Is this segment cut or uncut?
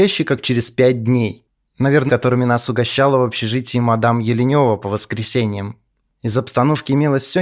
cut